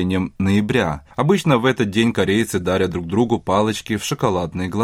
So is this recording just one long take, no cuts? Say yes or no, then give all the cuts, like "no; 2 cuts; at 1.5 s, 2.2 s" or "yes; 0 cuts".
no; 1 cut; at 1.1 s